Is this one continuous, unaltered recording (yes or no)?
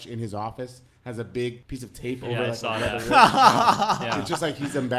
yes